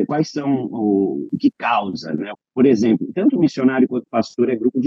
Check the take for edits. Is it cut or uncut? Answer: cut